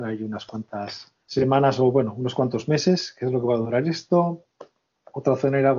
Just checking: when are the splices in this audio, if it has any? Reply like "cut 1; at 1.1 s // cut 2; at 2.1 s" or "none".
cut 1; at 1.2 s